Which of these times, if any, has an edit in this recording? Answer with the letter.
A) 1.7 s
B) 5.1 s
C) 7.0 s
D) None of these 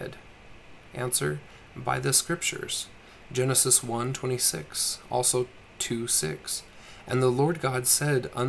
D